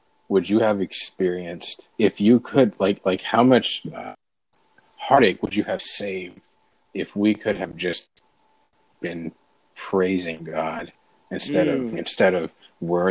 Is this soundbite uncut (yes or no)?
no